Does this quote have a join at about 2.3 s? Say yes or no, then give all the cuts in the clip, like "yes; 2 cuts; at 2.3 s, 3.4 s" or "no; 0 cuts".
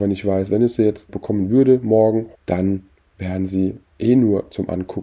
yes; 2 cuts; at 1.1 s, 2.3 s